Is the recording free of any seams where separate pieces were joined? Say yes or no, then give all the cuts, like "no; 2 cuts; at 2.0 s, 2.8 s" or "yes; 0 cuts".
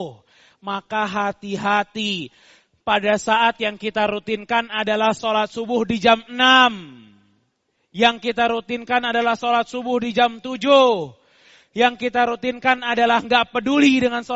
yes; 0 cuts